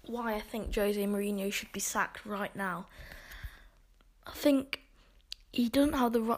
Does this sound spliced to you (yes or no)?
no